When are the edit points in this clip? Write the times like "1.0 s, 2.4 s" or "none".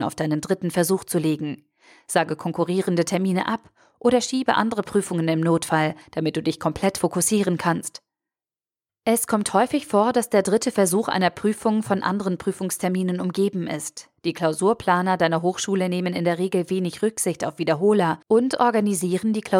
8.9 s, 18.2 s